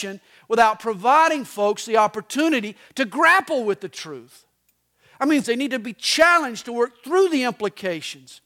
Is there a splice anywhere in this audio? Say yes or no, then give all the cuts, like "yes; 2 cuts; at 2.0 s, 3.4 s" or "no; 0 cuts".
yes; 1 cut; at 5.4 s